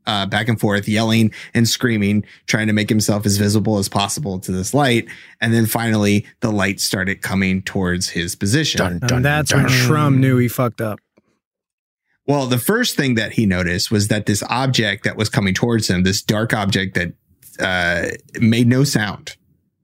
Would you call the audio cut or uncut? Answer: uncut